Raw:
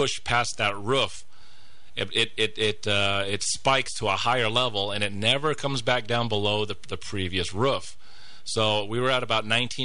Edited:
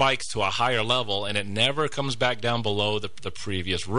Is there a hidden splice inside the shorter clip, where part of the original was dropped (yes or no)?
no